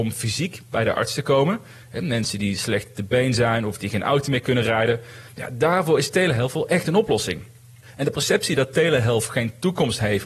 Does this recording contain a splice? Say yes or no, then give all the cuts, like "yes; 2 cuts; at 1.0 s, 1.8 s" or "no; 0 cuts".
no; 0 cuts